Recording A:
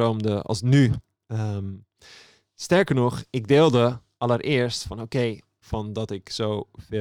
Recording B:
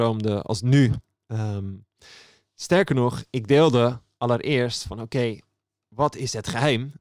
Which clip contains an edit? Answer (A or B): A